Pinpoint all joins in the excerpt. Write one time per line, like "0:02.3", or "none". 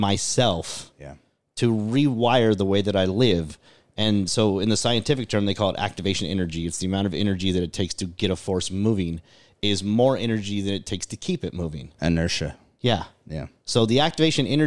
none